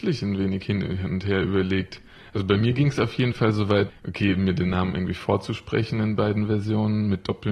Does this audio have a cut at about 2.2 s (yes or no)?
no